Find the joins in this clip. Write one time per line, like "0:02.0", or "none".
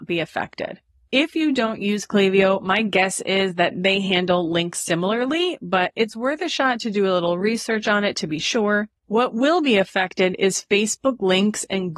0:01.0
0:09.0